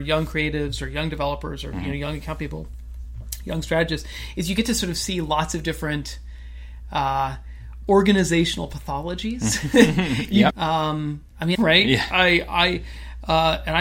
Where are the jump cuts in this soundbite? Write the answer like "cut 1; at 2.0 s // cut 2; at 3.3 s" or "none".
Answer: cut 1; at 10.5 s // cut 2; at 11.5 s